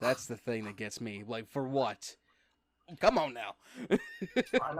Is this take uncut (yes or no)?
no